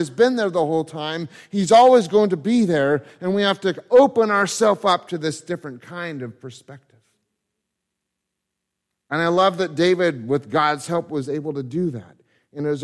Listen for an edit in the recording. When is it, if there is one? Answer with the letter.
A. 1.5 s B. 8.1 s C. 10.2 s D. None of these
D